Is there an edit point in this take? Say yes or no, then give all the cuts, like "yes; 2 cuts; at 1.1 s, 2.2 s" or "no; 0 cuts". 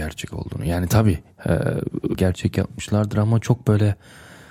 yes; 1 cut; at 2.1 s